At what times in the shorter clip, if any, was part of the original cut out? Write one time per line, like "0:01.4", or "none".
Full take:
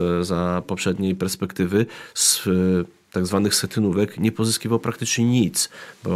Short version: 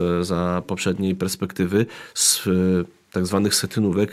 none